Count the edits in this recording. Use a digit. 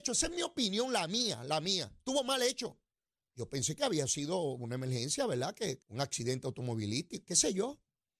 2